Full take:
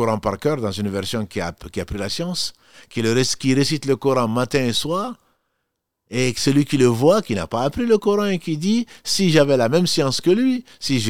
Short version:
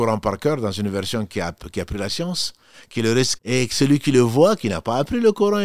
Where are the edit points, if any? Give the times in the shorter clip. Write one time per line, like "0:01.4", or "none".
0:03.4

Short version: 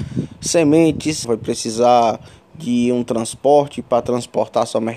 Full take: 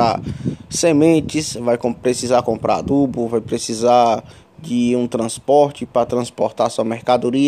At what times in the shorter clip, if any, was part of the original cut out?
0:01.2

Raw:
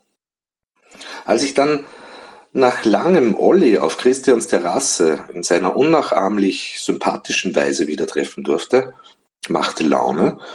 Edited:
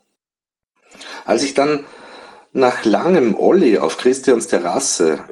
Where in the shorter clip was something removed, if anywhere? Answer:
none

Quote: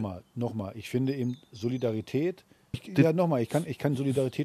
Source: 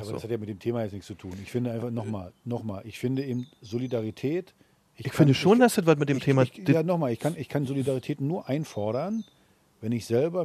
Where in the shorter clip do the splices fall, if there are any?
0:02.7

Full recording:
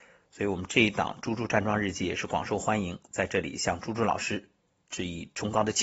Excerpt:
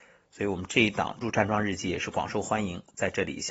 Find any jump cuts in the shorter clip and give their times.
0:01.2

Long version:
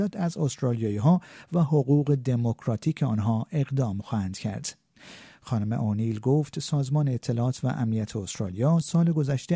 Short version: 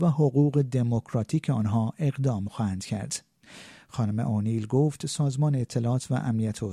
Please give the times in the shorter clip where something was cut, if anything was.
none

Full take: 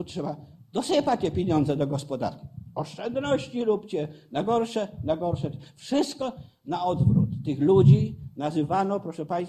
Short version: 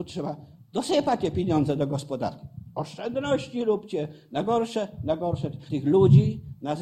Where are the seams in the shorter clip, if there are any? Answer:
0:05.7

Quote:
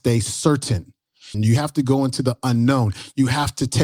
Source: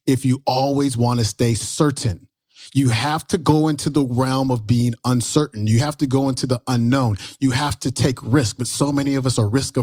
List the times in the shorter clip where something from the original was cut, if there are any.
0:01.3

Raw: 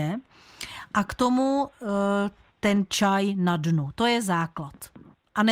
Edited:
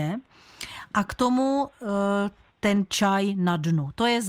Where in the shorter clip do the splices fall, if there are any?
none

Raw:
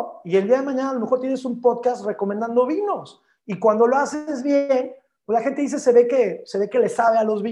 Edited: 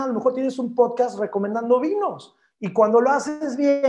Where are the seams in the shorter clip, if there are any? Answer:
none

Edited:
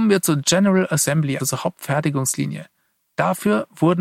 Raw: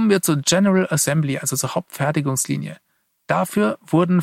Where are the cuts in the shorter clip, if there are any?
0:01.4

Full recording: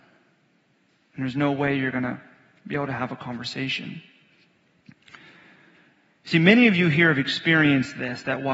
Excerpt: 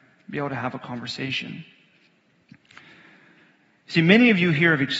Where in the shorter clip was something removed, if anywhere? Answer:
none

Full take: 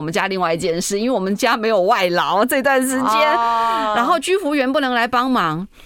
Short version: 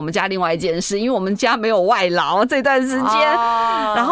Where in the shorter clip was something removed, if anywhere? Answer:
none

